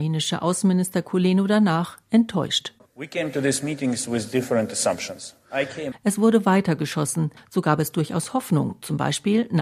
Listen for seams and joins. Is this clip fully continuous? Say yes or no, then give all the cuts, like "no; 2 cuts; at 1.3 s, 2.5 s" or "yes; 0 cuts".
no; 2 cuts; at 5.9 s, 7.4 s